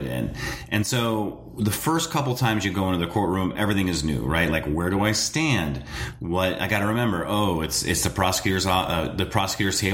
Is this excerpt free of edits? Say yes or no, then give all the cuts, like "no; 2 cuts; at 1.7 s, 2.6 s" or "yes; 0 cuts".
yes; 0 cuts